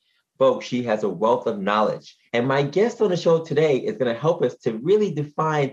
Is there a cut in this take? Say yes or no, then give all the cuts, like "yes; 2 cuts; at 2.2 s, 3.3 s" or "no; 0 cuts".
yes; 1 cut; at 2.3 s